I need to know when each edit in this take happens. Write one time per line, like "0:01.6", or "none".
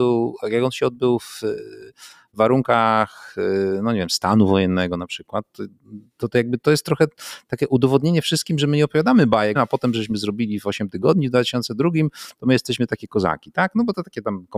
0:09.6